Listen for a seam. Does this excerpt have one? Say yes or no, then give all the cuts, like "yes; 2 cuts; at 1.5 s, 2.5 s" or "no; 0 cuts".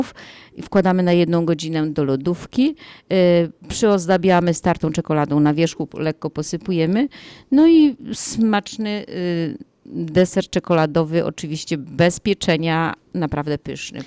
no; 0 cuts